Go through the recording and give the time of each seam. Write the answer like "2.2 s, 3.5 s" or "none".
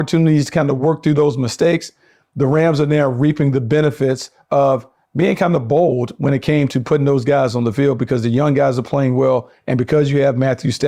none